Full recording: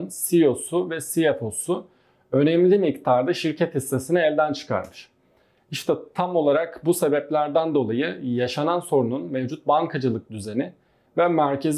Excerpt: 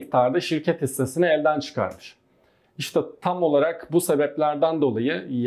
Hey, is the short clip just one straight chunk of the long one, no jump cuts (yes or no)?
yes